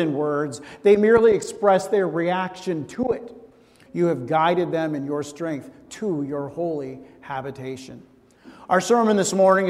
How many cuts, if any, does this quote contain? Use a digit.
1